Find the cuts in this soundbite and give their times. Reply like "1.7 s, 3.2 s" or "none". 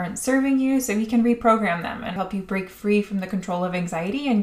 2.2 s